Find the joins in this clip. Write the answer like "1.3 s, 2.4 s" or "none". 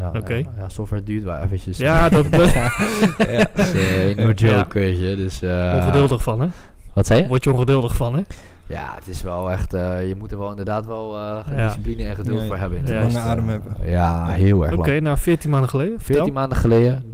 none